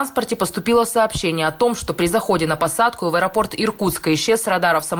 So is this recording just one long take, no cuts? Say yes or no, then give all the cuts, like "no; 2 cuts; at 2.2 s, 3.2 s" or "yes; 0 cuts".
yes; 0 cuts